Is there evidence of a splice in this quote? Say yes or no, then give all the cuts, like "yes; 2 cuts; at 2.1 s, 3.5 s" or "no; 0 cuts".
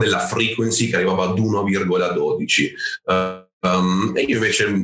no; 0 cuts